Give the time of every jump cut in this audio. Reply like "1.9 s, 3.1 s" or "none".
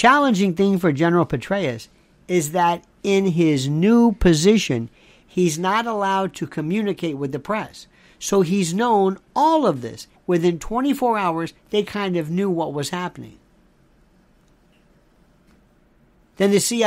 10.2 s